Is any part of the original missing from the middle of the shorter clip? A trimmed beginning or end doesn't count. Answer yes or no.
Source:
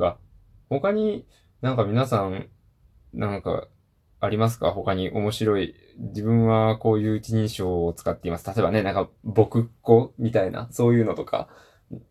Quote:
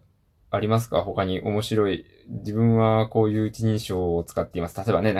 no